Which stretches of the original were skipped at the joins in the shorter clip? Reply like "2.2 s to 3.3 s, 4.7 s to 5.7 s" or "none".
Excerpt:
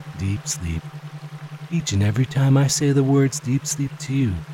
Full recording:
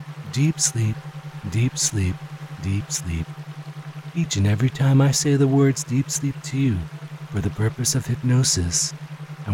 none